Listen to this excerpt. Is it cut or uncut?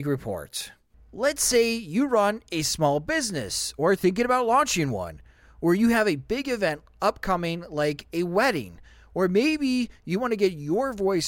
cut